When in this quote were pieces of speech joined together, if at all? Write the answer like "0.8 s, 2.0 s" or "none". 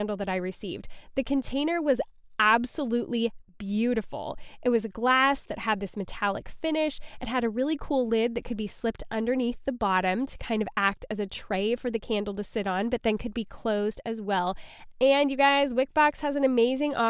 14.9 s